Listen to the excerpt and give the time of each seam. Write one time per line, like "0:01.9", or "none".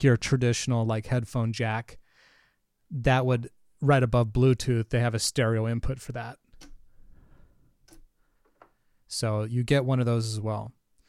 none